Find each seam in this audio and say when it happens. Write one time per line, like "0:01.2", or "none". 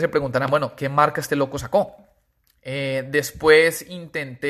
0:02.5